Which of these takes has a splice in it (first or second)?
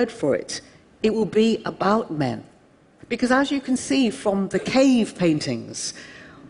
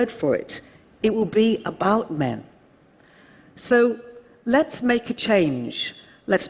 first